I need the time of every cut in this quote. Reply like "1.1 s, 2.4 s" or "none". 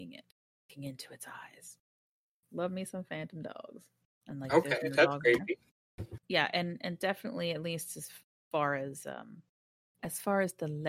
4.2 s, 6.2 s